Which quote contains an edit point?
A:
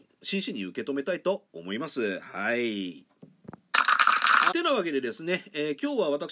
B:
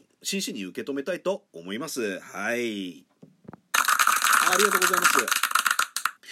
A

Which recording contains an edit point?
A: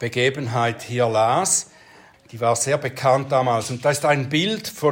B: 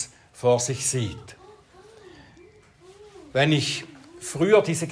A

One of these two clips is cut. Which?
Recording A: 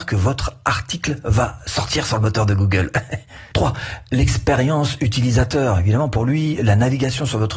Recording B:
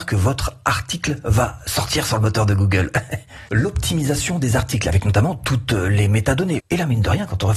B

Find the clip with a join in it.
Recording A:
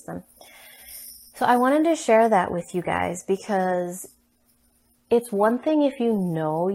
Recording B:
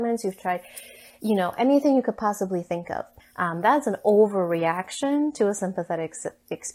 B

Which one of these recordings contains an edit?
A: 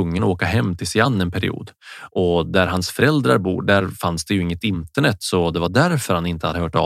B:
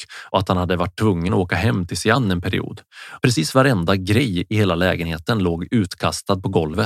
B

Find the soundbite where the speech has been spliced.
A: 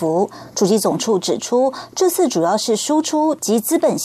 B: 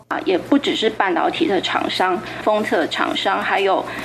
B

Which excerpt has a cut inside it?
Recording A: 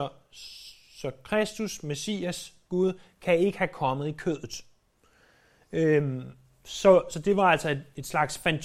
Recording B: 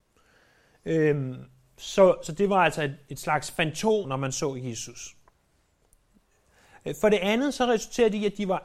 B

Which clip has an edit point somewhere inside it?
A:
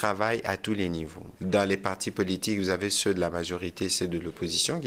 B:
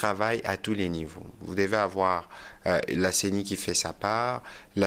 A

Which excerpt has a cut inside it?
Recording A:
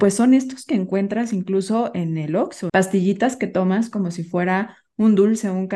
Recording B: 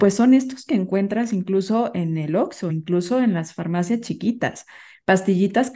A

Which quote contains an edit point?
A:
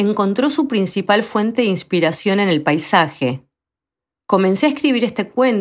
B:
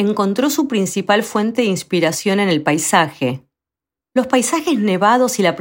B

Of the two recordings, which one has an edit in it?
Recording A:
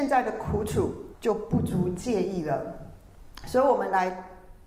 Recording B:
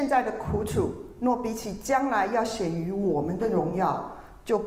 A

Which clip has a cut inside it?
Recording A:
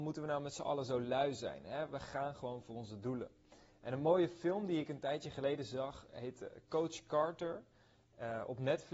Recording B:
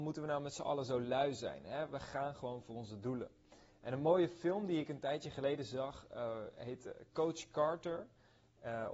A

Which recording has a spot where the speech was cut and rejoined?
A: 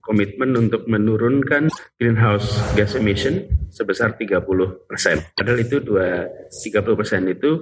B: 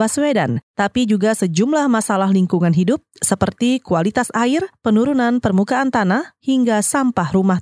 A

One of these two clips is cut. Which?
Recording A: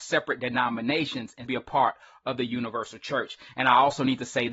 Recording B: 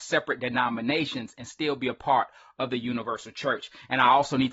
A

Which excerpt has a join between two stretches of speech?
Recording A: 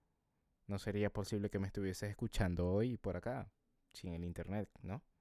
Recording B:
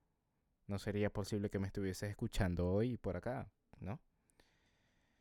B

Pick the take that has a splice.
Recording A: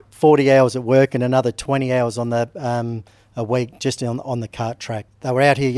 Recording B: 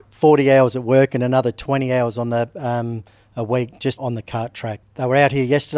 B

